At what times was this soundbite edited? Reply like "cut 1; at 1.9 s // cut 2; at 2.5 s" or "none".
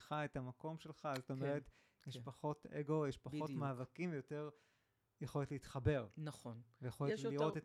none